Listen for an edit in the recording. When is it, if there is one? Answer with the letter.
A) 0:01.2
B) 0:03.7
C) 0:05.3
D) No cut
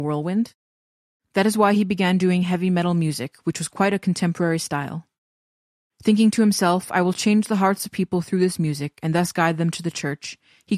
D